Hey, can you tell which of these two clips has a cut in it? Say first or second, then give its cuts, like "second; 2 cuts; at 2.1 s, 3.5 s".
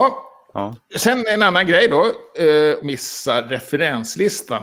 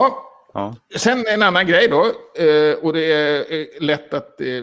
first; 1 cut; at 2.8 s